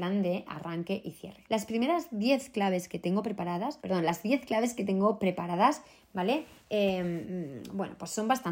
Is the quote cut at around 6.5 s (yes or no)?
no